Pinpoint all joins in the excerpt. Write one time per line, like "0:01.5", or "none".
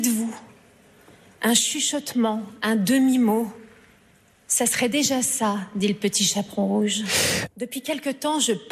0:07.5

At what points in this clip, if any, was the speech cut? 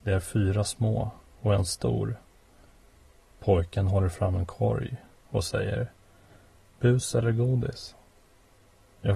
none

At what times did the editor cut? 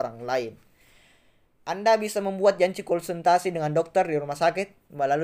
none

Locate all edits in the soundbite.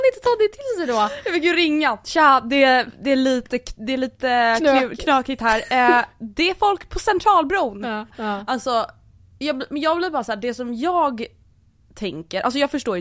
0:08.1

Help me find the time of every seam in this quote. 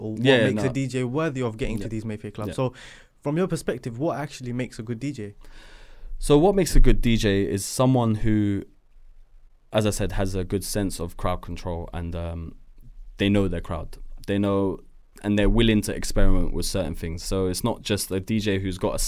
none

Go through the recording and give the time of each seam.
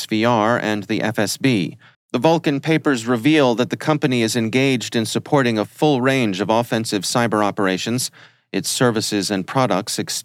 0:01.9

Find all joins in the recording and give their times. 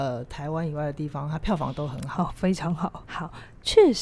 0:03.0

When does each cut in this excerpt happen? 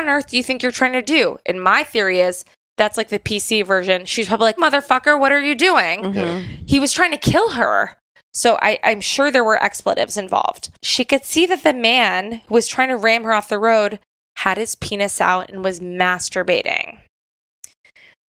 0:04.6

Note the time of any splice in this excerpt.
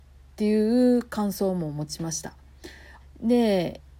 0:03.0

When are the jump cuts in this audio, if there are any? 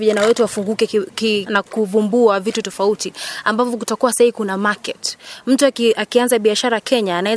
0:01.5
0:02.6

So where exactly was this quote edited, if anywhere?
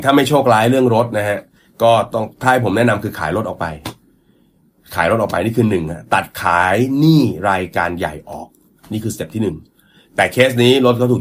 none

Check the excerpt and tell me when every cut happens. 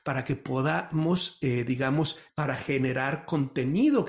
0:02.3

